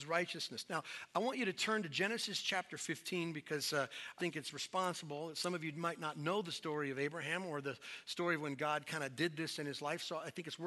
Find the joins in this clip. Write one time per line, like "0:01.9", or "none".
0:04.2